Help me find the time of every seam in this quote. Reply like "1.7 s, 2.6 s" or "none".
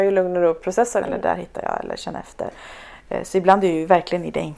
1.0 s